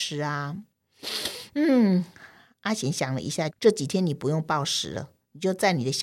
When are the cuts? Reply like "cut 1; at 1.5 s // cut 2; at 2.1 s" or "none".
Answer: cut 1; at 3.5 s